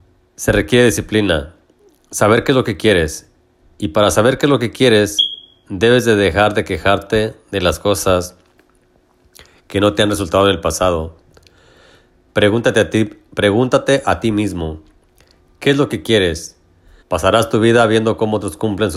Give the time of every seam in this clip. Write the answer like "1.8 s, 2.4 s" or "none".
12.3 s, 17.0 s